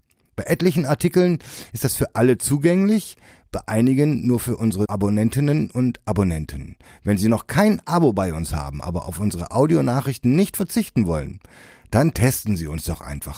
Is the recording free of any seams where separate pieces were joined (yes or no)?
yes